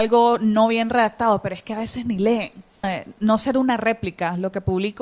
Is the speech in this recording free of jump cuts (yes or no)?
no